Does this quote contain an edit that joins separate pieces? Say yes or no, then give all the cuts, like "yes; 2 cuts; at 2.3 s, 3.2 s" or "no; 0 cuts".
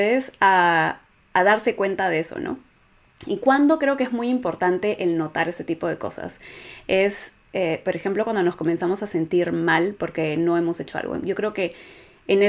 no; 0 cuts